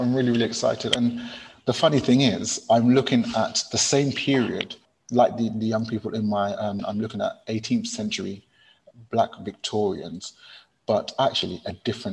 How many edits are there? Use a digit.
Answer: 1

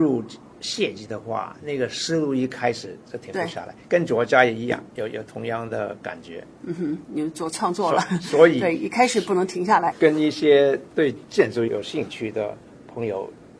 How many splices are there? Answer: 1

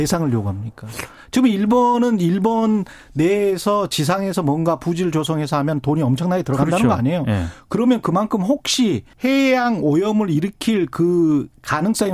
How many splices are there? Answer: 1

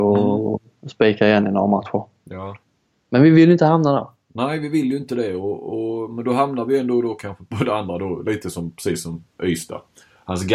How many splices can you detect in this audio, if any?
0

